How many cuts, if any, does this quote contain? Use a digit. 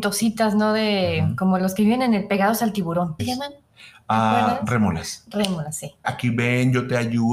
2